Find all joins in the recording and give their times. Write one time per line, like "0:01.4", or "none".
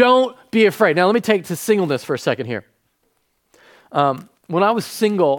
0:04.4